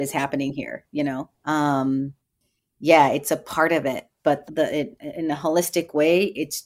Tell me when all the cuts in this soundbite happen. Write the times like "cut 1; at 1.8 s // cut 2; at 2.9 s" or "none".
cut 1; at 1.3 s // cut 2; at 4.5 s